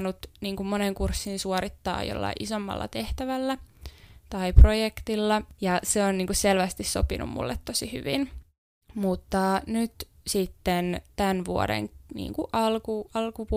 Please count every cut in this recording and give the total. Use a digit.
1